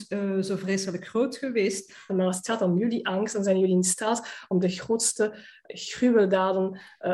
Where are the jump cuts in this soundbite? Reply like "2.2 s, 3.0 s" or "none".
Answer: 2.1 s

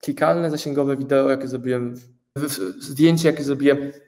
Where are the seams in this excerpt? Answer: 2.4 s

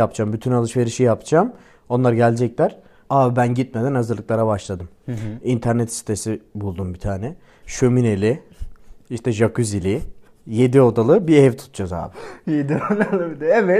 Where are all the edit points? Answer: 3.1 s

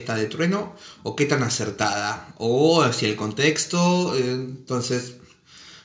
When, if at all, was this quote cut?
none

